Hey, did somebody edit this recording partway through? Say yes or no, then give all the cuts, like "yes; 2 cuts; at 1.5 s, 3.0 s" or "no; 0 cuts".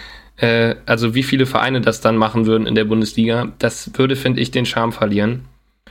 no; 0 cuts